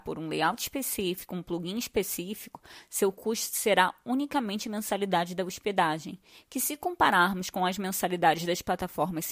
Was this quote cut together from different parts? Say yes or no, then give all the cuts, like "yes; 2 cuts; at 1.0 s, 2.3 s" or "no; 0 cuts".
no; 0 cuts